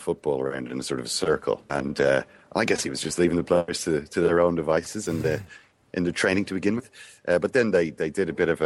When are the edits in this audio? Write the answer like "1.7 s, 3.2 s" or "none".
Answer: 1.7 s